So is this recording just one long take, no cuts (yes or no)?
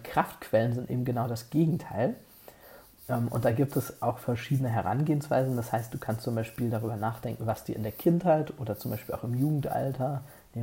yes